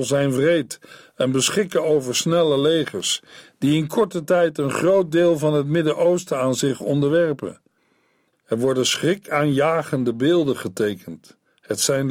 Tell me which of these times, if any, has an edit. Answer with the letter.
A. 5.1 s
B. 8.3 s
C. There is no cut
B